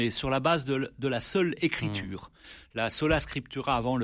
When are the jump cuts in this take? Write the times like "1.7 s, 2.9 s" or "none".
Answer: none